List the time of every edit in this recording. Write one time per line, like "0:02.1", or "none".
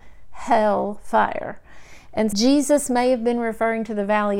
0:02.3